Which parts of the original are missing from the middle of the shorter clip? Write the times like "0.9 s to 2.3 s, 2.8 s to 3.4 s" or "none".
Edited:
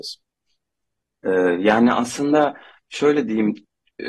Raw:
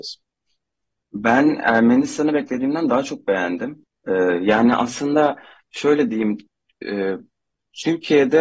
1.1 s to 3.9 s